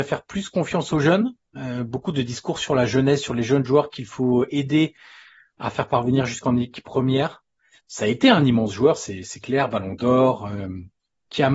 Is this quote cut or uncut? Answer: cut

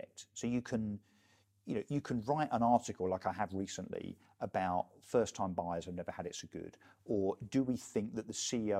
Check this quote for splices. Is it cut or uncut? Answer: uncut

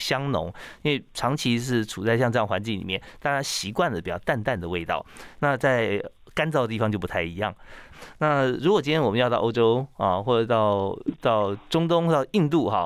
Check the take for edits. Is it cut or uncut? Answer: uncut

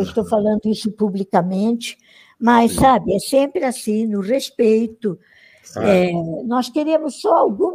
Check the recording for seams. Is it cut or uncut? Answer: uncut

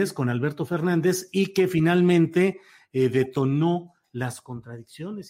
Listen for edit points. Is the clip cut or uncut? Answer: uncut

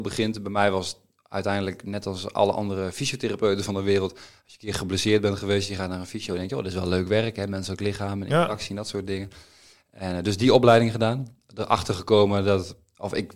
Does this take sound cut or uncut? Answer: uncut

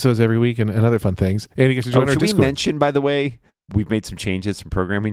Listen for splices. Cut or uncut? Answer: cut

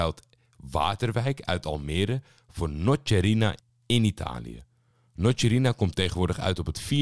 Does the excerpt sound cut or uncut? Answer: uncut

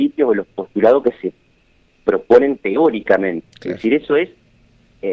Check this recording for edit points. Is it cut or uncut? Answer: cut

